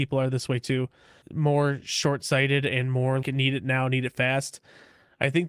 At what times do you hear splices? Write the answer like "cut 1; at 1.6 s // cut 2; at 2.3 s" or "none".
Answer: cut 1; at 1.2 s // cut 2; at 3.2 s